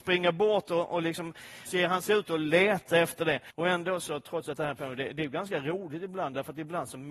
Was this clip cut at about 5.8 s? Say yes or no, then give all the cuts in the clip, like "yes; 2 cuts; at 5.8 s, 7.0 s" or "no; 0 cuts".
no; 2 cuts; at 1.7 s, 3.5 s